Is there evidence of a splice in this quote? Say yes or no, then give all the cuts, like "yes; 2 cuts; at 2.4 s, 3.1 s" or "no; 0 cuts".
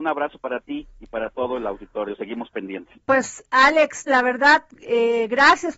yes; 2 cuts; at 2.9 s, 4.1 s